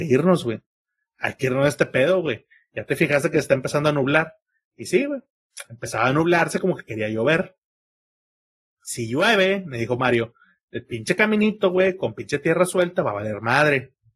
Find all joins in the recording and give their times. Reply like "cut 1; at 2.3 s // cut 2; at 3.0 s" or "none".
none